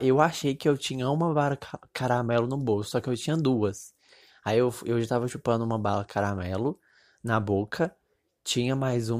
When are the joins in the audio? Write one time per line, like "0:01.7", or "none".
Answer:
none